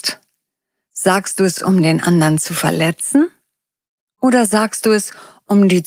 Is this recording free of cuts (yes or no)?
yes